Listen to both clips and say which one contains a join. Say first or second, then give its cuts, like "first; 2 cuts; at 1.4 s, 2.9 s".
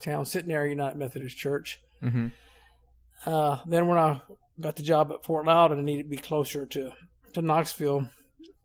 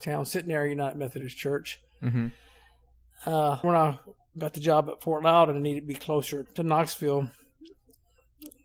second; 2 cuts; at 3.6 s, 6.4 s